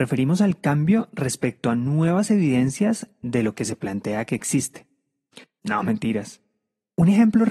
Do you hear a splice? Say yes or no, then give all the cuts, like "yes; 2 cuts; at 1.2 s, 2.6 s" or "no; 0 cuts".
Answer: yes; 1 cut; at 5.6 s